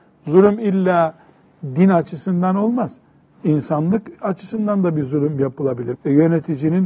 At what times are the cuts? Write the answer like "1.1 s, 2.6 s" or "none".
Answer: 5.9 s